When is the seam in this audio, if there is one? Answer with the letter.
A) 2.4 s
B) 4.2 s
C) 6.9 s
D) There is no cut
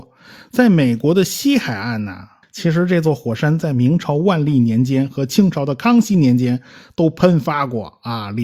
A